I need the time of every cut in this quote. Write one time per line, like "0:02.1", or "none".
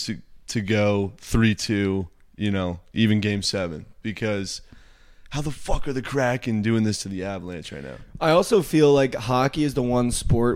none

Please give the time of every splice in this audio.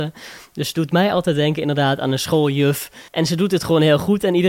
0:03.1

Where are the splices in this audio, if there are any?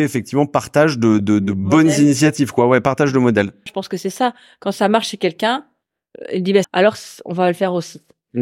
0:01.2
0:03.7
0:06.6

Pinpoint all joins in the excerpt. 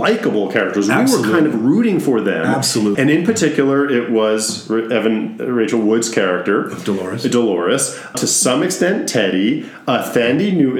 0:02.9
0:08.1

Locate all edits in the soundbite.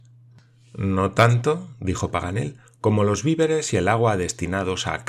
none

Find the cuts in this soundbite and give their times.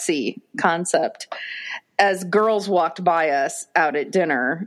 none

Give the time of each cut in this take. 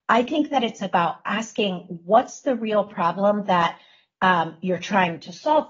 none

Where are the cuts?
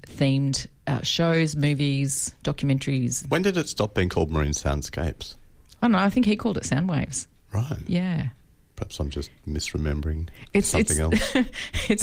none

